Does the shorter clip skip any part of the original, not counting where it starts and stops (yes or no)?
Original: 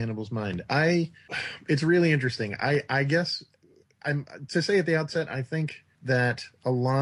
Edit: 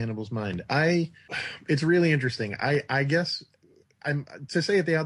no